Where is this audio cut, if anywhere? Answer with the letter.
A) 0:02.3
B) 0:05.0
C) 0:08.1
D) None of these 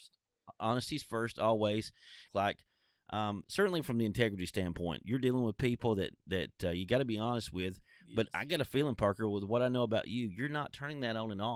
A